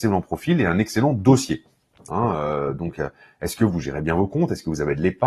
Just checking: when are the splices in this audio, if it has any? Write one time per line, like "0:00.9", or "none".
0:02.1